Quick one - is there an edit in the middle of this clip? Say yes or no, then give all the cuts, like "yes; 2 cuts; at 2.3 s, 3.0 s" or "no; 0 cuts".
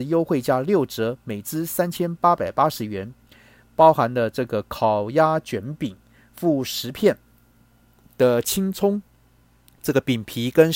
no; 0 cuts